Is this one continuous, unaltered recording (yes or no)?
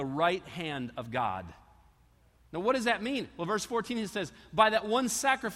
yes